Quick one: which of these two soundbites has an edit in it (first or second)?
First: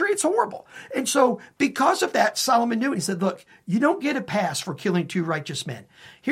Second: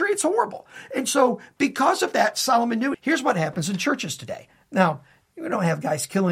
second